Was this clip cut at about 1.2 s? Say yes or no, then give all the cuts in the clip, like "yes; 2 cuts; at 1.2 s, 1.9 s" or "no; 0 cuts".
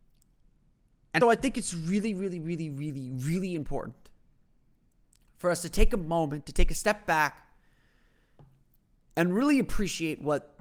yes; 1 cut; at 1.2 s